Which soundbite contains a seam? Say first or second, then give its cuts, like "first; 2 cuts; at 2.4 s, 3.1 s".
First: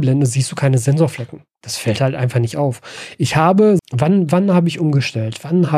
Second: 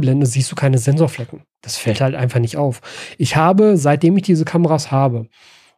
first; 1 cut; at 3.8 s